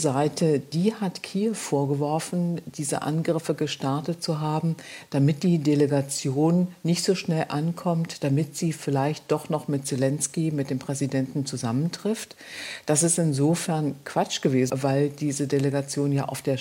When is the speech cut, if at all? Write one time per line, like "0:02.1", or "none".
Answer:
0:14.7